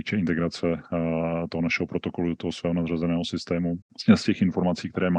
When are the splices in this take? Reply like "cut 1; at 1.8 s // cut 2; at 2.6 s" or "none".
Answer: cut 1; at 3.8 s